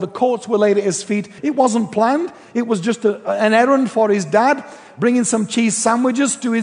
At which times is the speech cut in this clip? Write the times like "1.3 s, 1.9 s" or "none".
1.4 s